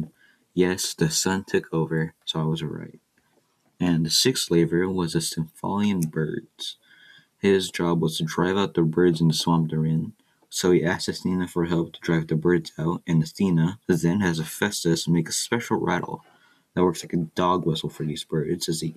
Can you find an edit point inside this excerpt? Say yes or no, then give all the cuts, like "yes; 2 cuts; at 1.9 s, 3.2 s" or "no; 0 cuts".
no; 0 cuts